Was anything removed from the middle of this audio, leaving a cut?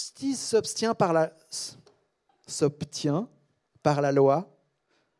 yes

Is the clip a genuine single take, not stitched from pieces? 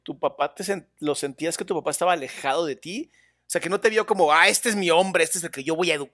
yes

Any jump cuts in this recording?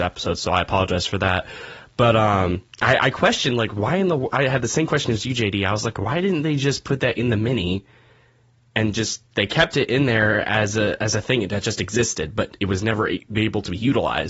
no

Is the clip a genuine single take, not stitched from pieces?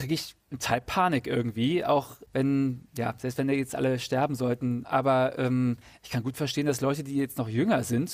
no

